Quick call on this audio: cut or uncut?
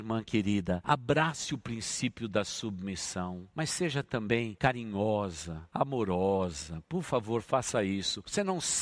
uncut